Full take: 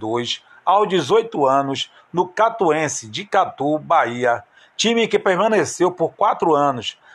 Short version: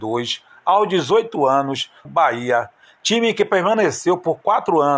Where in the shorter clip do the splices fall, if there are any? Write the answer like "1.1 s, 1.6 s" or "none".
2.0 s